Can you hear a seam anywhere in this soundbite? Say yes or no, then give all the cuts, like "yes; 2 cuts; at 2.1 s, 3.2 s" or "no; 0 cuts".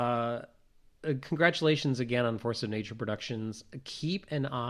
no; 0 cuts